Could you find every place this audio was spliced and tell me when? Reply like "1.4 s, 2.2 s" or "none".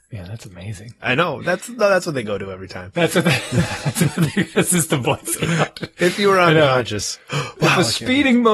none